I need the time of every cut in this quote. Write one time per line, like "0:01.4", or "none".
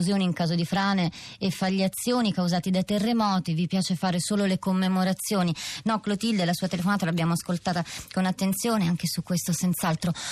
none